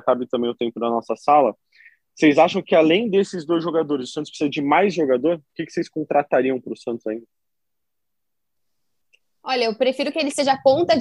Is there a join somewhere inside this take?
no; 0 cuts

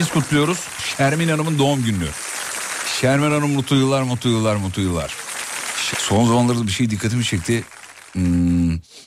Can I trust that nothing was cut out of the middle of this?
no; 1 cut; at 5.9 s

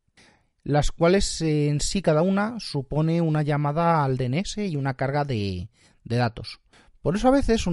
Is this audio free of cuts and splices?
yes; 0 cuts

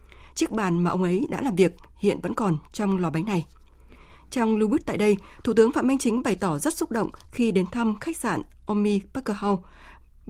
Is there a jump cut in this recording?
no; 0 cuts

